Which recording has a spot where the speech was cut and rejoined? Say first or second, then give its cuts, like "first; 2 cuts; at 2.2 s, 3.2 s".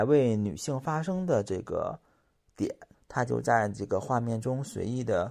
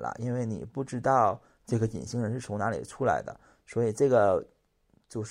first; 1 cut; at 2.9 s